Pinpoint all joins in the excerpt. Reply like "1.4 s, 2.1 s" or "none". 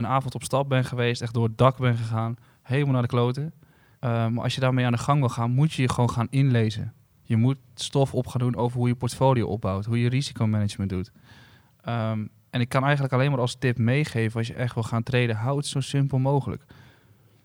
3.9 s